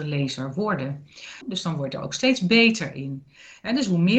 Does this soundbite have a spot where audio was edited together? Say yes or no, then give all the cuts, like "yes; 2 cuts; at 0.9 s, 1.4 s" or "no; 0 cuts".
yes; 1 cut; at 1.4 s